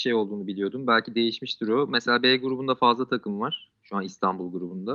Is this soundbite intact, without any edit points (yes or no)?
no